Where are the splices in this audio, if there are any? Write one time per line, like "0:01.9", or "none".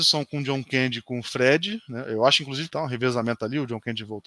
0:02.7